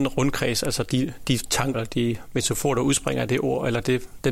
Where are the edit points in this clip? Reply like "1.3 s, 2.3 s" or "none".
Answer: 1.7 s

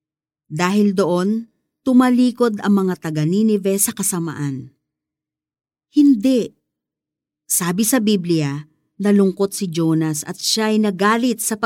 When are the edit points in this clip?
5.8 s

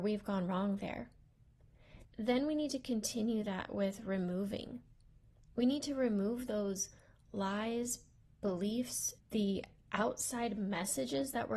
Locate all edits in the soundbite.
2.0 s, 9.2 s

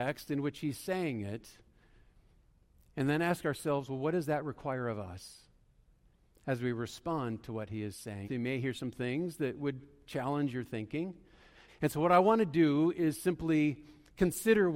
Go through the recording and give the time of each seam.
8.2 s, 11.7 s

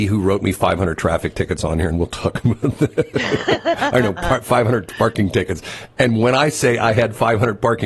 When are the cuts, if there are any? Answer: none

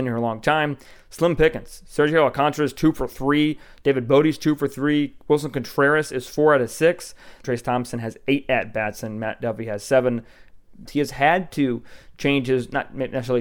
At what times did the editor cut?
7.4 s, 10.8 s

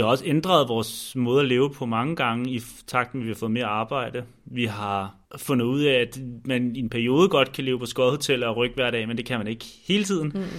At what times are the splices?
5.3 s

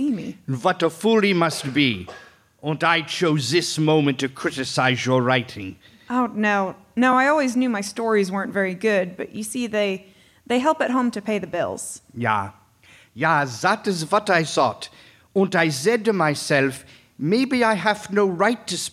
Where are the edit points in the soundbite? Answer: none

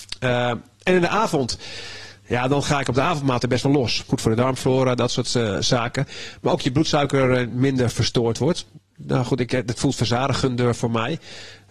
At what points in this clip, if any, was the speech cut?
4.1 s

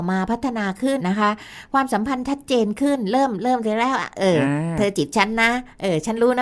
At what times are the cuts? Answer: 1.0 s

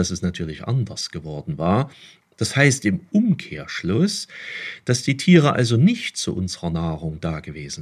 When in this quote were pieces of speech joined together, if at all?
2.2 s

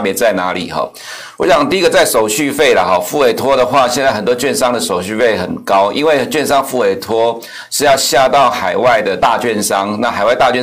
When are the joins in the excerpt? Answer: none

